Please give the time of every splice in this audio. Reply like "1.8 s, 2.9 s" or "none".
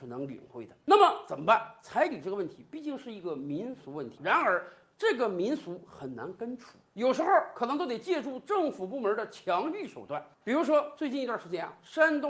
4.2 s